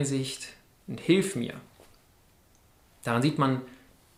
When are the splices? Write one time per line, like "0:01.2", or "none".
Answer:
none